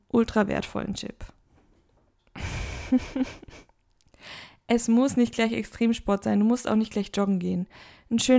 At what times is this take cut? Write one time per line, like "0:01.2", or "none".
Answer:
0:02.2